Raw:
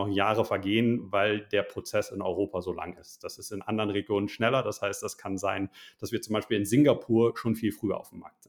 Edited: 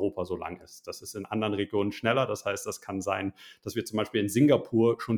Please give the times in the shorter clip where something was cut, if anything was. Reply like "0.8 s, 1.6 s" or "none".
none